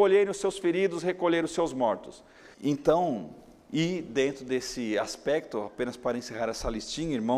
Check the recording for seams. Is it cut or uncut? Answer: cut